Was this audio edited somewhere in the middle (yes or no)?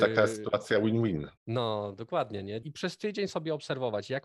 yes